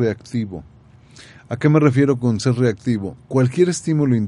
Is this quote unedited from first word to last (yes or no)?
yes